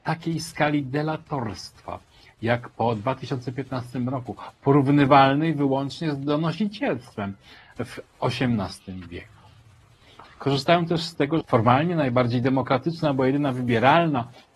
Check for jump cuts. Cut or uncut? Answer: cut